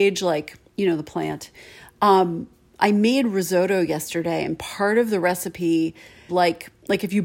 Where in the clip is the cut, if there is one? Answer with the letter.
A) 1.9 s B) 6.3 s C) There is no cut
B